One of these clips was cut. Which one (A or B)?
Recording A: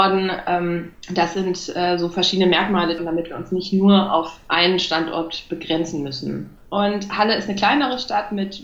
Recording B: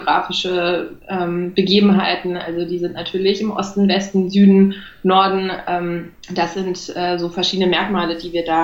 A